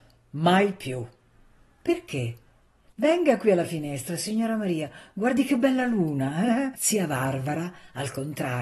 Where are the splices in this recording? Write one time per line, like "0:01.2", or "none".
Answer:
0:06.7

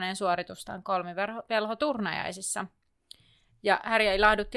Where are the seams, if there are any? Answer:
none

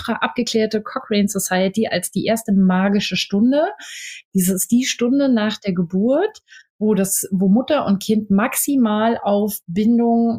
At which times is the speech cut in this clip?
none

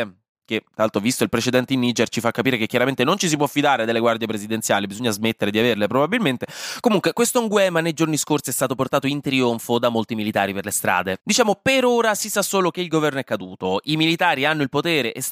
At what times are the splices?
none

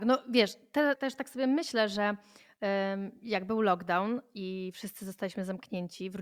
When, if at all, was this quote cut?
0:01.0

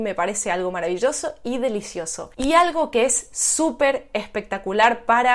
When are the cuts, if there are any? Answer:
0:02.3

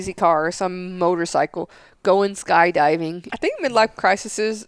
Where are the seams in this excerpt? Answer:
0:03.3

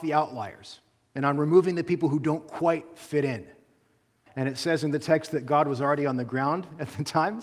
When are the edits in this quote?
0:04.3

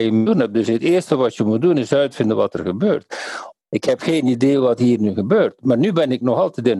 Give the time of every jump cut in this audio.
0:03.6

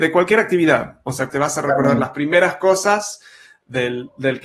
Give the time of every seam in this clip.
0:01.3

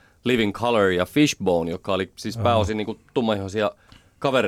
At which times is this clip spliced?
none

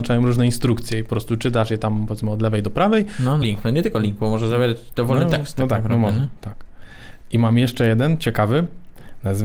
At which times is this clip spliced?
0:03.4

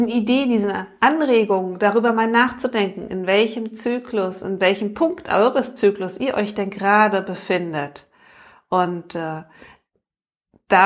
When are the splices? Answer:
none

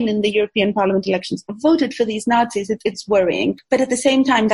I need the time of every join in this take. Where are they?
none

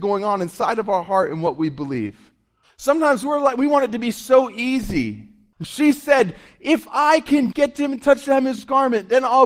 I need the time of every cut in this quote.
0:02.6
0:05.5
0:07.5

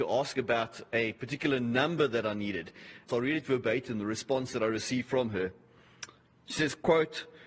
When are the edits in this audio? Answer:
0:03.1

